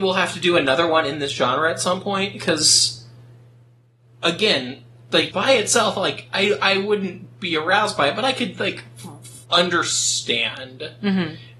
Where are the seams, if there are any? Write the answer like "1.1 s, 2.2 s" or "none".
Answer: 5.3 s, 9.4 s